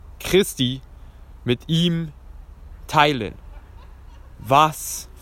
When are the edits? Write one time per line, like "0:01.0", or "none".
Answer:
none